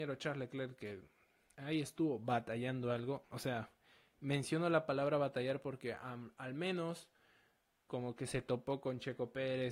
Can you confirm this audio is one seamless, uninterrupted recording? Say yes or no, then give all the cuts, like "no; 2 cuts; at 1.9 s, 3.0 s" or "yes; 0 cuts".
no; 1 cut; at 3.2 s